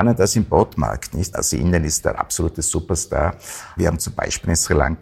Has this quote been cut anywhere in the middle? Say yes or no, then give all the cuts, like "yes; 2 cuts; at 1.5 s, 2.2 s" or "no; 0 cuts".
yes; 2 cuts; at 1.3 s, 3.8 s